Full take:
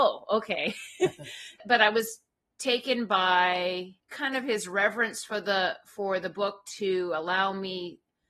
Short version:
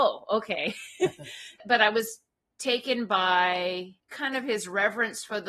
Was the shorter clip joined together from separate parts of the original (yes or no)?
no